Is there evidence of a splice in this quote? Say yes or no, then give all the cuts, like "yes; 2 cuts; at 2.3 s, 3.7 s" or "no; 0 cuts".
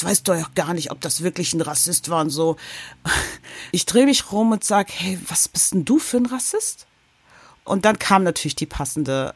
yes; 1 cut; at 3.7 s